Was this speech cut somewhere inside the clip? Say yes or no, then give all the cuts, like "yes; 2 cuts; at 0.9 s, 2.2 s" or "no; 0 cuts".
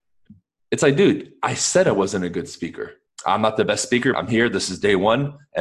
yes; 2 cuts; at 3.1 s, 4.1 s